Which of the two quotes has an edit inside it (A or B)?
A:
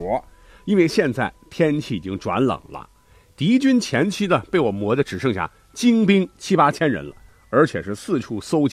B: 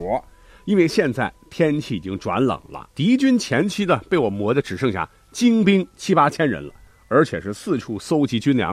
B